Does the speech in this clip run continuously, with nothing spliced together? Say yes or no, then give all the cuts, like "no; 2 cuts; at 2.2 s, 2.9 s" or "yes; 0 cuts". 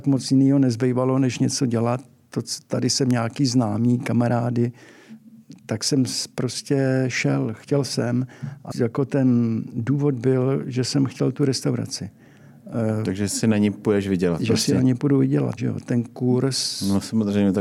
no; 2 cuts; at 8.7 s, 15.6 s